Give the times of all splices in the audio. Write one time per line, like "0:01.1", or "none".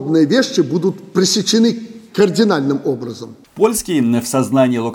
0:03.4